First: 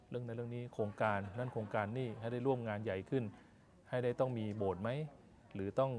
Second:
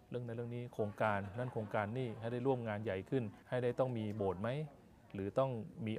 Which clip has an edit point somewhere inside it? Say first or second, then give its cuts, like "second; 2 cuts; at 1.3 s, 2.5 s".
second; 1 cut; at 3.4 s